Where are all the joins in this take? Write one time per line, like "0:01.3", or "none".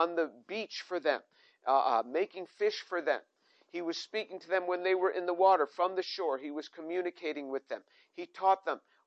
none